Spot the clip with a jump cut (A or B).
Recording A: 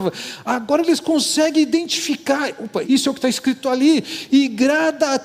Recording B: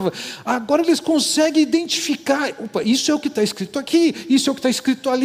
A